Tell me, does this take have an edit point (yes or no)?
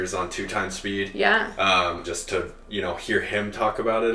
yes